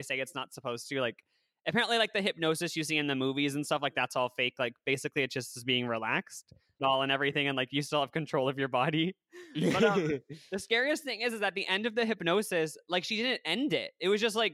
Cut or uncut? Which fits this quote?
cut